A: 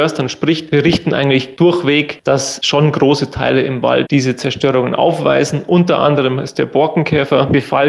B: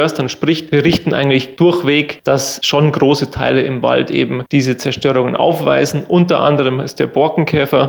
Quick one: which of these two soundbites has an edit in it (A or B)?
A